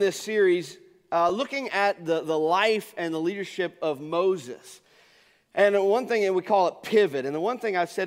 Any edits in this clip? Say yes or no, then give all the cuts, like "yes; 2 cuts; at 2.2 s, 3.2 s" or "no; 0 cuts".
no; 0 cuts